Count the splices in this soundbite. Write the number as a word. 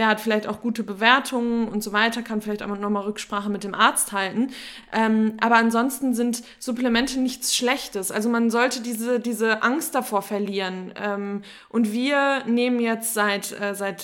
zero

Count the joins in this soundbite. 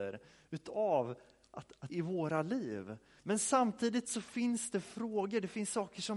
two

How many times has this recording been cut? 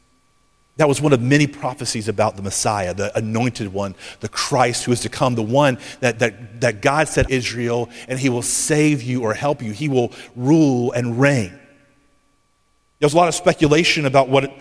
one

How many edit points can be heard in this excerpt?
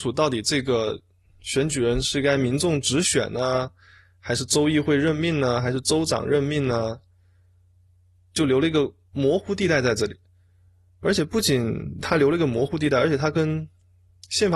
zero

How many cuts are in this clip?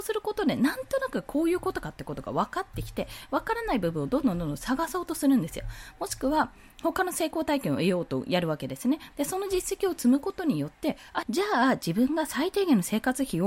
two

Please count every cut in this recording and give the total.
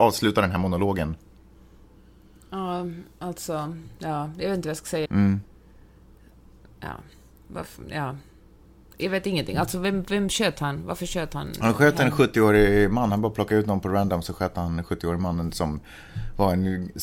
one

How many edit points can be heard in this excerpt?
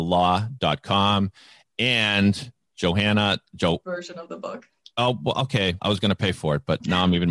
two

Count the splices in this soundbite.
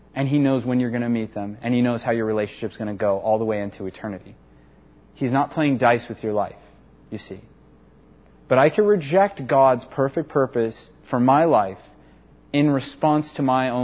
zero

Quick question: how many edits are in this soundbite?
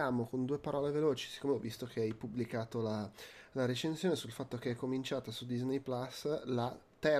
zero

